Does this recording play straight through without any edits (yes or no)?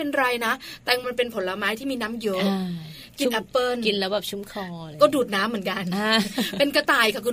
no